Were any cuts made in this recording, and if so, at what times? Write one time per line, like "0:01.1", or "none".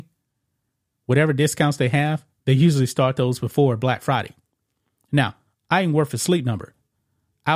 none